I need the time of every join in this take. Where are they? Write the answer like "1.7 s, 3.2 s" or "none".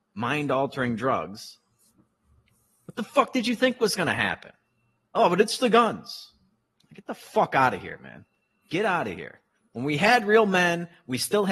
none